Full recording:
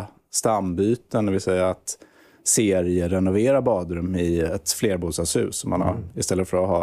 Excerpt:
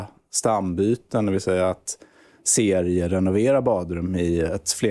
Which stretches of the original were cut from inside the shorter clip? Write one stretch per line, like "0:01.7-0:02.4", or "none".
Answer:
none